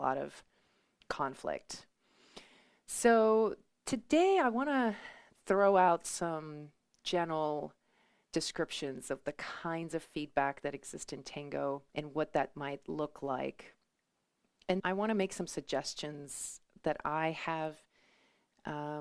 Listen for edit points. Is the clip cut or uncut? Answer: cut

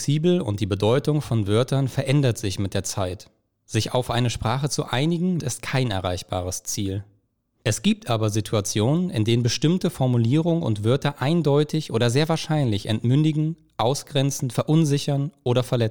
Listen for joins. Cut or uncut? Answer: cut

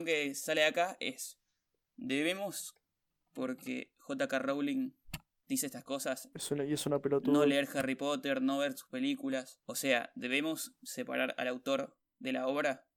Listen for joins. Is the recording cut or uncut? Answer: uncut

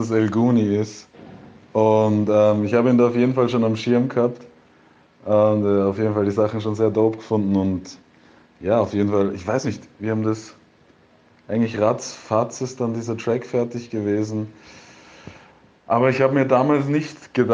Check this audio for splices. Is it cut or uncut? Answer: uncut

